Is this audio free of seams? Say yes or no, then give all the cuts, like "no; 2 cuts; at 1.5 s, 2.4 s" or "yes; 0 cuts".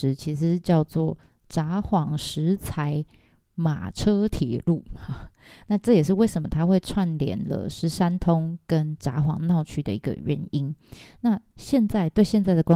yes; 0 cuts